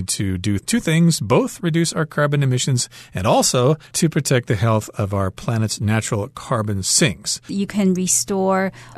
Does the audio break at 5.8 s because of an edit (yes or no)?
no